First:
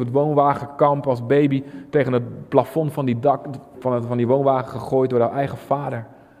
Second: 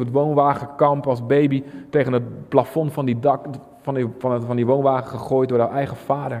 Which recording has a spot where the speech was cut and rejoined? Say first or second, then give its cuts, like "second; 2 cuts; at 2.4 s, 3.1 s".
first; 1 cut; at 3.7 s